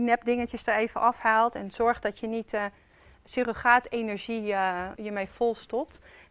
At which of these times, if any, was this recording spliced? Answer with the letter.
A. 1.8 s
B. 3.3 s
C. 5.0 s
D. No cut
C